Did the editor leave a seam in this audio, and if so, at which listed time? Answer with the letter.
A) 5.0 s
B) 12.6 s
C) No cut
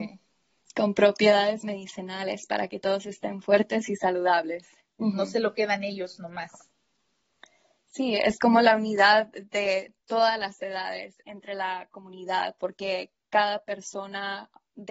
A